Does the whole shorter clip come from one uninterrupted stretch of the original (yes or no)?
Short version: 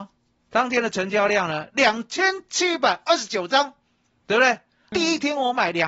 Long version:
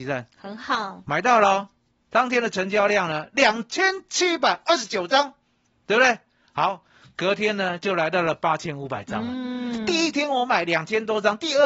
no